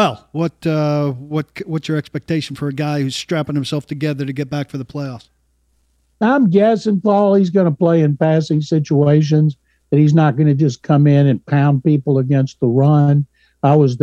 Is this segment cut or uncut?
uncut